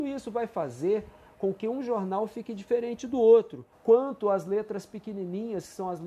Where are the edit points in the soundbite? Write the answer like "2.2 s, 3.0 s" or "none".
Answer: 3.7 s